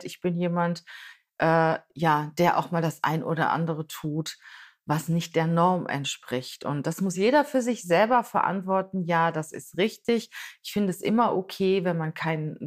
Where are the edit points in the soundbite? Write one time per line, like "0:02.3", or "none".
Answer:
none